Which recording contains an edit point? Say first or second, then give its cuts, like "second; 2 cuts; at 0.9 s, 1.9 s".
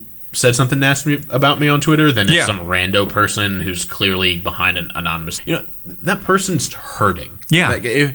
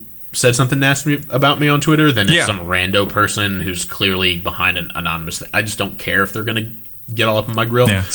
first; 2 cuts; at 5.4 s, 6.7 s